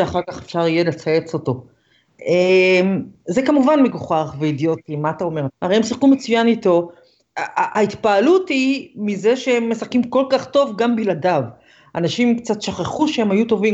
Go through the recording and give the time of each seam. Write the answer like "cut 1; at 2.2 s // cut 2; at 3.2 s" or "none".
cut 1; at 5.5 s // cut 2; at 7.2 s